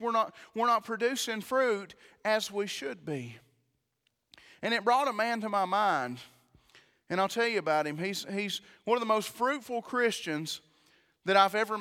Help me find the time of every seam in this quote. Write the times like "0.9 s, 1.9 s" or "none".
none